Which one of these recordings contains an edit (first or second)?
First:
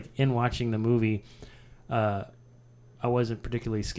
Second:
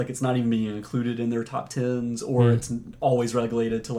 first